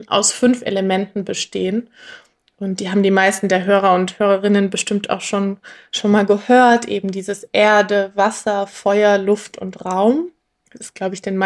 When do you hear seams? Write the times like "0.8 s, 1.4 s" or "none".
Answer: none